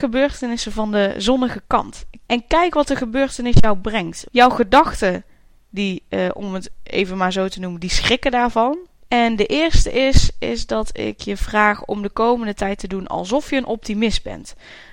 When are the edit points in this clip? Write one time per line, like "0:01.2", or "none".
0:02.3
0:04.3
0:09.0